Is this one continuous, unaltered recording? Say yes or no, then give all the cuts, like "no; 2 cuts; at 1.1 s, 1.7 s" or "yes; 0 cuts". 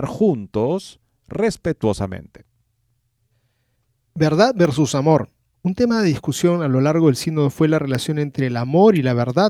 no; 1 cut; at 5.5 s